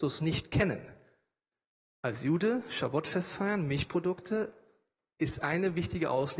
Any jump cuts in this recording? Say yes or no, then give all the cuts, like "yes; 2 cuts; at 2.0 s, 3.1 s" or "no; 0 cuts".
no; 0 cuts